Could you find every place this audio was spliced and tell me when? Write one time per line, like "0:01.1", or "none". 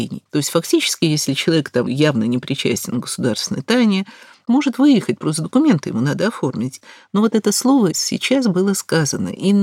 0:01.9